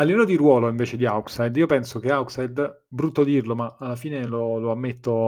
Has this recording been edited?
no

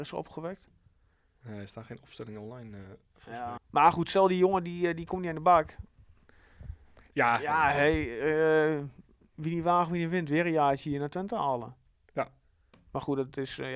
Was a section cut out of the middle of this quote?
yes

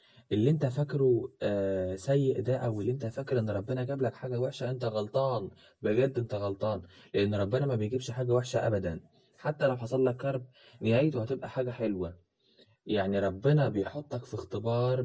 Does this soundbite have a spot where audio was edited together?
no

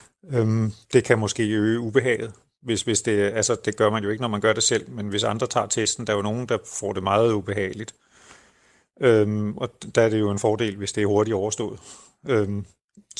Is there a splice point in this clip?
no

